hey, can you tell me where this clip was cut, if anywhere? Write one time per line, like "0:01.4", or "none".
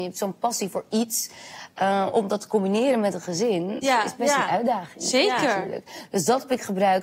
0:03.8